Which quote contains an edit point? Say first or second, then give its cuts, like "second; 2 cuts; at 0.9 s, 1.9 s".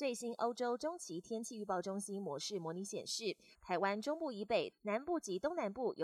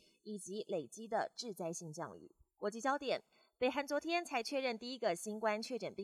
first; 2 cuts; at 3.5 s, 4.7 s